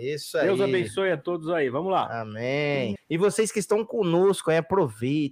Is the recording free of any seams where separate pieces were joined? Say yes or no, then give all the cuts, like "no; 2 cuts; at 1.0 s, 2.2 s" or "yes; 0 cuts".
no; 1 cut; at 3.0 s